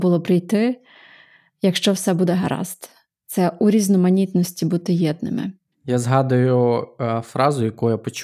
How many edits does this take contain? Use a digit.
0